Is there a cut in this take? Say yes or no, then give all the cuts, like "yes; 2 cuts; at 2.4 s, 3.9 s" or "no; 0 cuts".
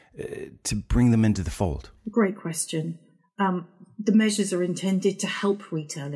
no; 0 cuts